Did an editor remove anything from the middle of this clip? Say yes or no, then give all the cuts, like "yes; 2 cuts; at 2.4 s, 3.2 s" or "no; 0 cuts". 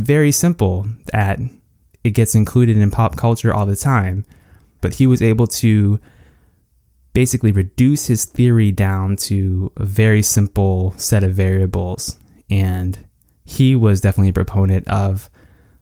yes; 1 cut; at 4.8 s